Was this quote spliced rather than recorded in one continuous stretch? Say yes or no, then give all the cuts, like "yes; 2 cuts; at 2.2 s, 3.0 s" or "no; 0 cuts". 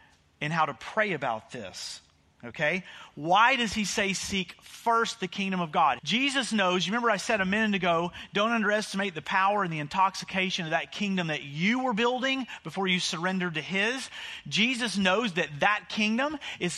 yes; 1 cut; at 6.0 s